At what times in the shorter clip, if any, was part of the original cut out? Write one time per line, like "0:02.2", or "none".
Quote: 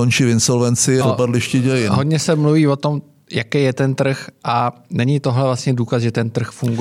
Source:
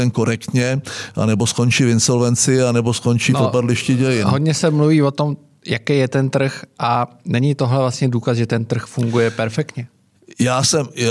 0:01.0